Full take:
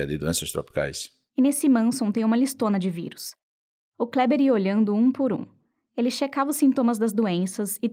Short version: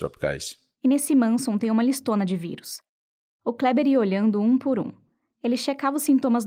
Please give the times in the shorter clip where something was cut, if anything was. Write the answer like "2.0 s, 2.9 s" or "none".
none